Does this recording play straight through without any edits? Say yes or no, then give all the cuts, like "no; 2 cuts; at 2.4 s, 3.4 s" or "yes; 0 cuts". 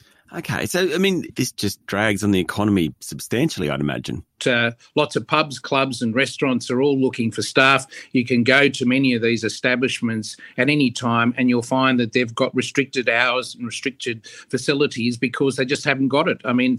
no; 2 cuts; at 1.3 s, 4.4 s